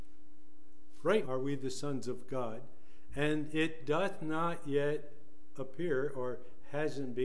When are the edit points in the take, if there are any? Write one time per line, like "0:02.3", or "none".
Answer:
0:01.2